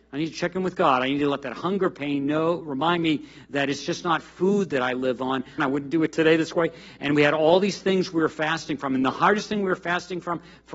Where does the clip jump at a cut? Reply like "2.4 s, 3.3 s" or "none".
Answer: 5.6 s